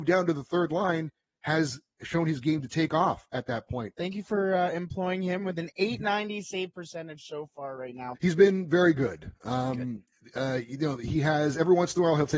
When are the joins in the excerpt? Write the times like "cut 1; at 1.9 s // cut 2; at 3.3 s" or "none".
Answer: cut 1; at 2.0 s // cut 2; at 4.0 s // cut 3; at 8.1 s